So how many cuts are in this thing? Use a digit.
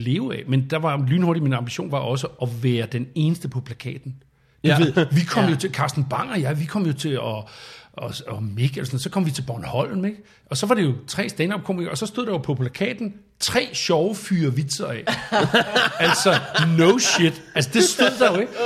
1